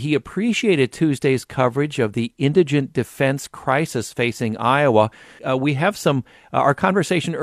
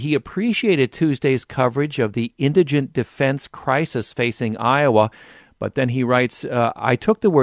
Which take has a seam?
first; 1 cut; at 5.4 s

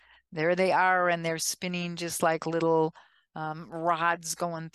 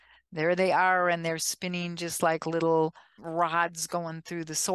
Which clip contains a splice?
second; 1 cut; at 3.2 s

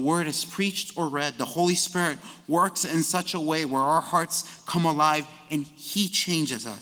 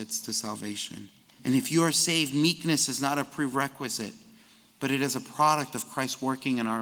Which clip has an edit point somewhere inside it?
second; 1 cut; at 1.3 s

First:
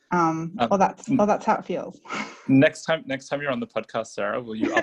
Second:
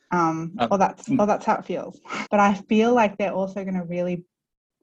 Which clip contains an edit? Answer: second; 1 cut; at 2.3 s

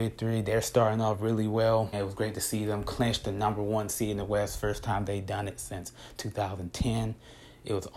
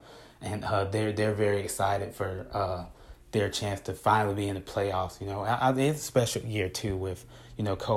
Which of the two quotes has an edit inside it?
first; 1 cut; at 1.9 s

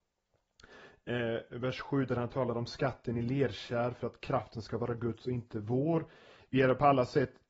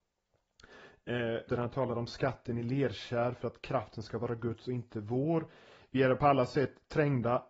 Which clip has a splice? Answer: second; 1 cut; at 1.5 s

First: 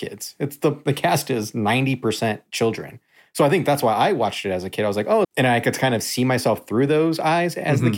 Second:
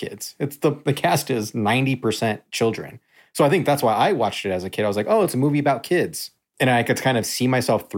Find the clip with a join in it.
first; 1 cut; at 5.2 s

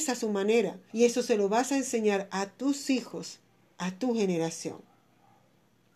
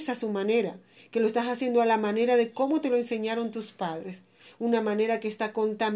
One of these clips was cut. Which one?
first; 1 cut; at 0.9 s

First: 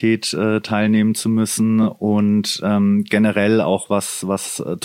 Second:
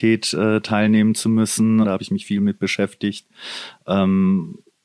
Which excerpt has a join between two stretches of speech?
second; 2 cuts; at 1.8 s, 3.8 s

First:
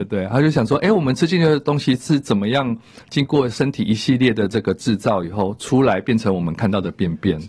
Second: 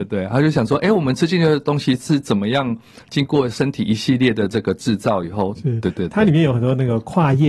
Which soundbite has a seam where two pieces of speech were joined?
second; 1 cut; at 5.5 s

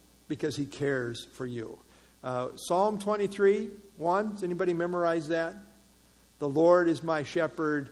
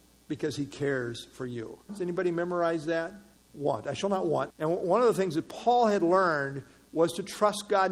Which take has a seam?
second; 3 cuts; at 1.9 s, 3.3 s, 4.5 s

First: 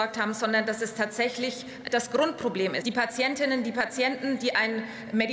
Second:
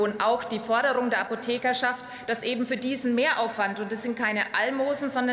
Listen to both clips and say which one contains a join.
first; 1 cut; at 2.8 s

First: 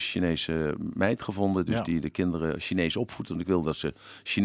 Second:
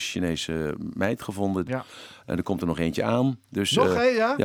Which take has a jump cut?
second; 1 cut; at 1.7 s

